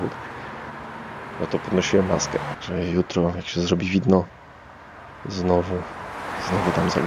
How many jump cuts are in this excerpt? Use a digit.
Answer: 1